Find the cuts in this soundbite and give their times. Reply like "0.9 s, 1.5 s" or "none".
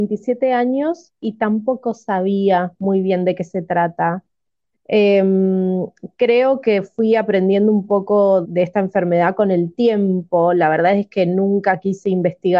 8.4 s